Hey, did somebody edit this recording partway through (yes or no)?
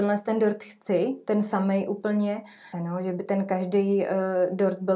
yes